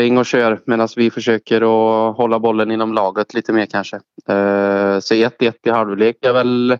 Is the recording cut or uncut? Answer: uncut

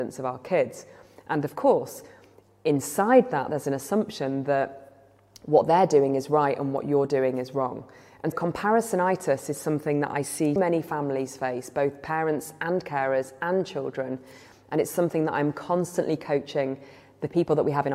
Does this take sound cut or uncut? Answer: cut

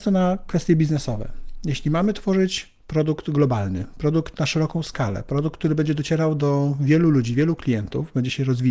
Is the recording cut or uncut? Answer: uncut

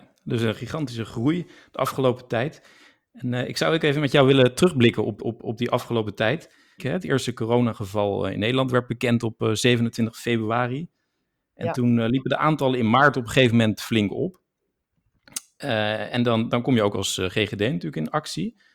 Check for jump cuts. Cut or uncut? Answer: cut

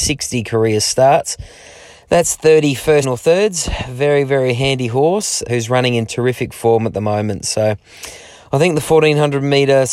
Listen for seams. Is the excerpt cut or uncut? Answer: cut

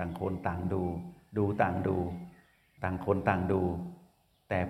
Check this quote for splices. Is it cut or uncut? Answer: uncut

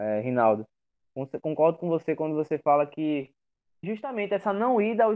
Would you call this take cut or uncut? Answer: cut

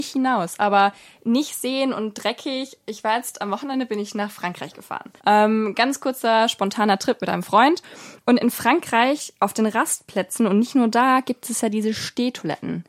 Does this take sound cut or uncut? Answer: cut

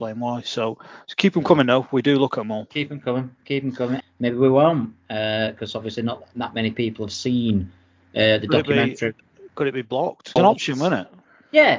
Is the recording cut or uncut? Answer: cut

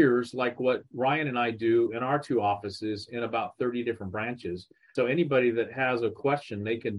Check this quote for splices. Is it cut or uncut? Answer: cut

